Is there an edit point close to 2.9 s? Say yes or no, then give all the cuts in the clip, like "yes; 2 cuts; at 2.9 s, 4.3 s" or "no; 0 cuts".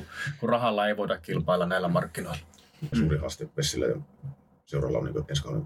yes; 1 cut; at 2.9 s